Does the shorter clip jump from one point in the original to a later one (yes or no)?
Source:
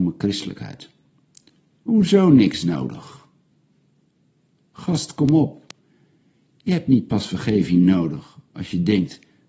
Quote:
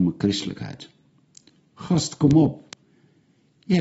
yes